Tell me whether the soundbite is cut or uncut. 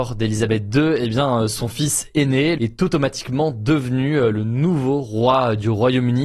cut